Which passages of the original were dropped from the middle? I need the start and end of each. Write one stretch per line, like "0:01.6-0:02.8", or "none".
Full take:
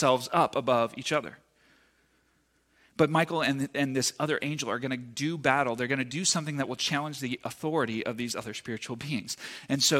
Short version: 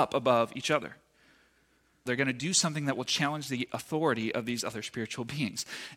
0:02.5-0:05.8